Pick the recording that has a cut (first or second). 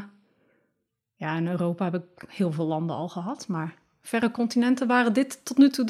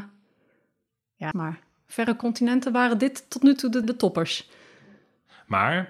second